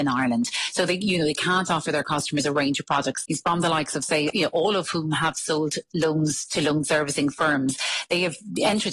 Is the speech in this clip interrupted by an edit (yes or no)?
yes